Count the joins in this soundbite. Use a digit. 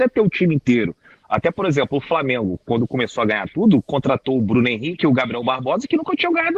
0